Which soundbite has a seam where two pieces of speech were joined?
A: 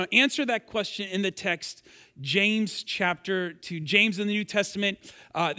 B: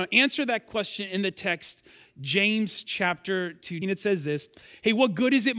B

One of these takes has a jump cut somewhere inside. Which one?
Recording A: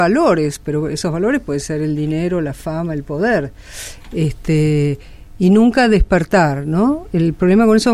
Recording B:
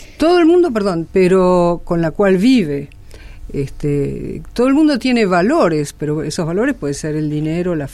B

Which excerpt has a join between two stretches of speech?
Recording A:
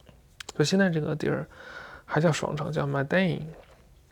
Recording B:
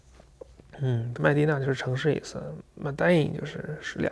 B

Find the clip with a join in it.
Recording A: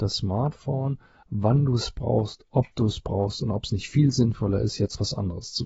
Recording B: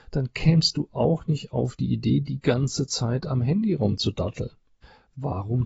A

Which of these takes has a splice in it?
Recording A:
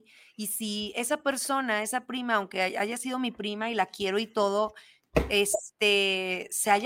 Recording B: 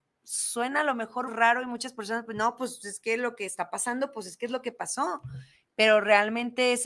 B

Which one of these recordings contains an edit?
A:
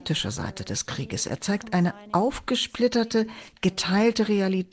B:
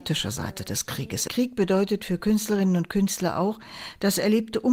B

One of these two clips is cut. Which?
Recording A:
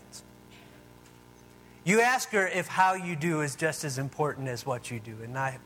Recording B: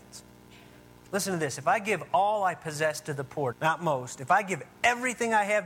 B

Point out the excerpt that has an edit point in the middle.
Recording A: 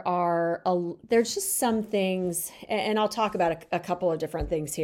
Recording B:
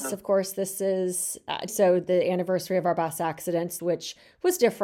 B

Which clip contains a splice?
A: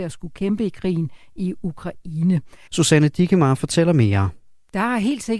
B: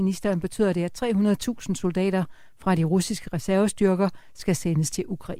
A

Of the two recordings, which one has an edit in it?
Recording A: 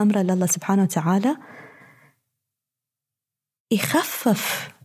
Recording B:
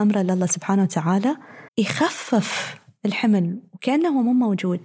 B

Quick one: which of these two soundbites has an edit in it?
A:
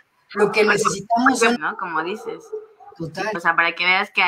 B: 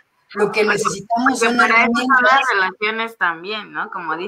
A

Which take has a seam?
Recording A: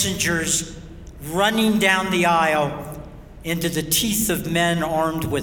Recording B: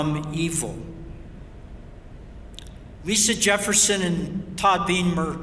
B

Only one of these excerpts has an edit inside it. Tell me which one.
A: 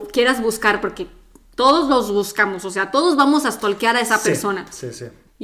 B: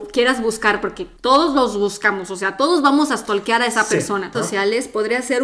B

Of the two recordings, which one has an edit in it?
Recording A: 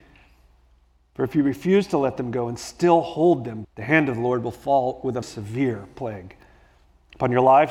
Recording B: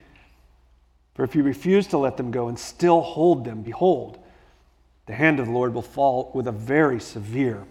A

